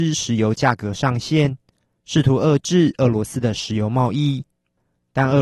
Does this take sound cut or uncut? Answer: uncut